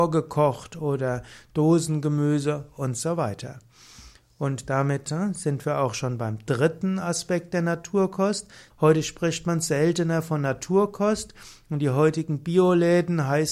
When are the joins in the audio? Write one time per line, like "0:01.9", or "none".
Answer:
0:08.7